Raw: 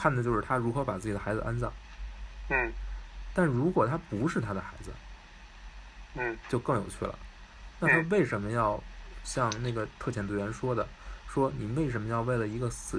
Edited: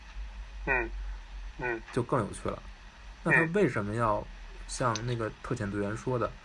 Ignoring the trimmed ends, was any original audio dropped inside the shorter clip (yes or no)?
yes